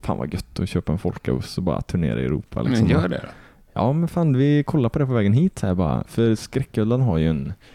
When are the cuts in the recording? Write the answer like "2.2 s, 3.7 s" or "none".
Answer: none